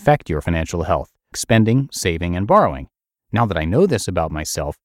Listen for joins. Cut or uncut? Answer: cut